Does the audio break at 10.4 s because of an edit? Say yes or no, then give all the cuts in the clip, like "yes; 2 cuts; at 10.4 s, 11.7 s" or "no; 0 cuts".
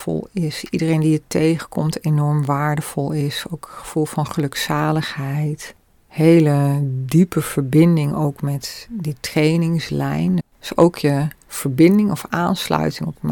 yes; 1 cut; at 10.4 s